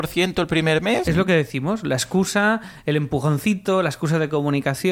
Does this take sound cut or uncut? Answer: cut